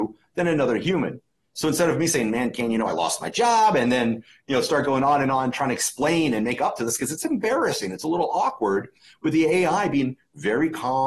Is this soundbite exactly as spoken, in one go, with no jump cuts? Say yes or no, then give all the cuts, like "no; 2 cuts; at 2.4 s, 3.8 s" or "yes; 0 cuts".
yes; 0 cuts